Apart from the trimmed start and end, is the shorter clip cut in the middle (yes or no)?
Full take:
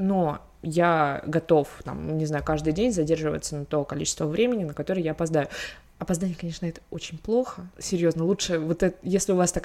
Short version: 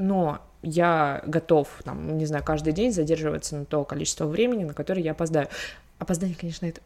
no